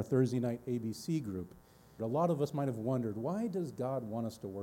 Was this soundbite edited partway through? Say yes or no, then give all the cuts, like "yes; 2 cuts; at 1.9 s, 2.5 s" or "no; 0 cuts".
yes; 1 cut; at 2.0 s